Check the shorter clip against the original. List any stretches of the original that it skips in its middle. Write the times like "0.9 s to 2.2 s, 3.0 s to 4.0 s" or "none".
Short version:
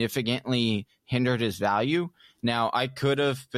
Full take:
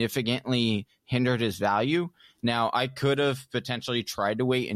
none